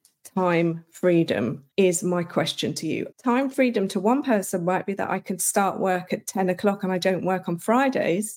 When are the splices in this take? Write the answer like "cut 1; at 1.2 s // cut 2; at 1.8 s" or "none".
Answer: cut 1; at 1.7 s // cut 2; at 3.1 s